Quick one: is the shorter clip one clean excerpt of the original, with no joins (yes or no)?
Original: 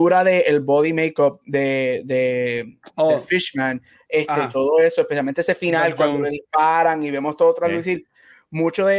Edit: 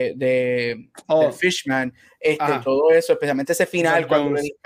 yes